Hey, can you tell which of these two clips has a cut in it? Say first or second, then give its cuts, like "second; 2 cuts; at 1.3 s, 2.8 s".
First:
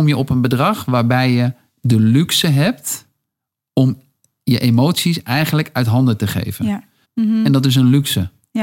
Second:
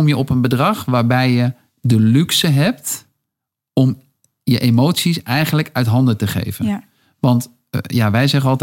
first; 1 cut; at 7.0 s